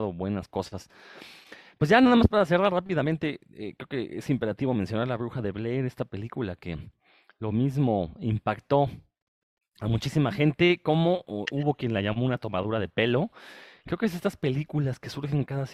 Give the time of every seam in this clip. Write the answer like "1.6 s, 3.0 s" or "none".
none